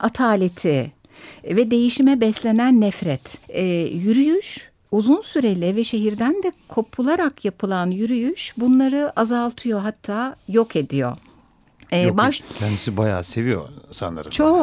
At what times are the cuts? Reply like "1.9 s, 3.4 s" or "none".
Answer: 3.4 s, 12.4 s